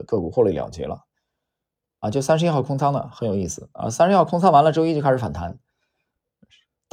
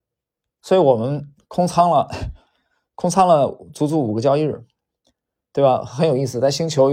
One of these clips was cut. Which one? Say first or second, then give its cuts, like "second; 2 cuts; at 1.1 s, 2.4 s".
first; 1 cut; at 2.0 s